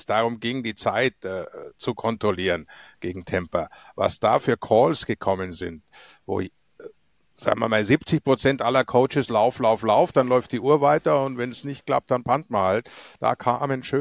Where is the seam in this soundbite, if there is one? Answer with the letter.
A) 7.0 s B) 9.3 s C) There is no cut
C